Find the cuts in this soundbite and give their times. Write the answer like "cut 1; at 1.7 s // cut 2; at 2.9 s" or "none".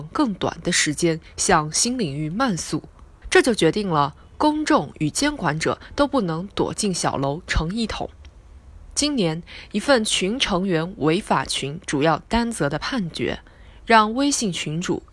cut 1; at 3.2 s